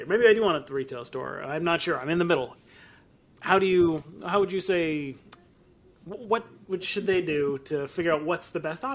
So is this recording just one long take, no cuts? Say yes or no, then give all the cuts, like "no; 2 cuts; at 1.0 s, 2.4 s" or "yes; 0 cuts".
yes; 0 cuts